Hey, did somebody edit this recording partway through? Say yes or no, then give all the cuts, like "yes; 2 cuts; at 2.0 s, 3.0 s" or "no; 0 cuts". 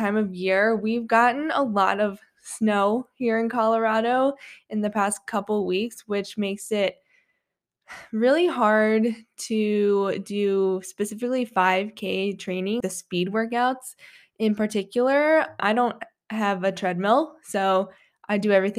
yes; 2 cuts; at 12.8 s, 15.6 s